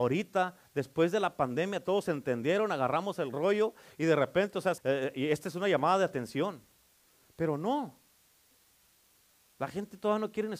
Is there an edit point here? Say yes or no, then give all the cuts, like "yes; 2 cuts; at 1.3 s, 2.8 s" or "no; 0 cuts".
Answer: yes; 1 cut; at 4.8 s